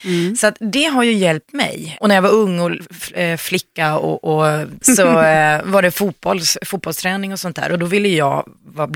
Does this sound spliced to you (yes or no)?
yes